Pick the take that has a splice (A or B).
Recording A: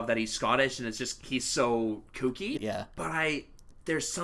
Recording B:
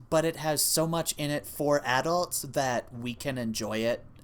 A